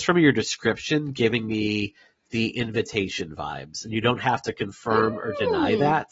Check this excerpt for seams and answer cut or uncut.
uncut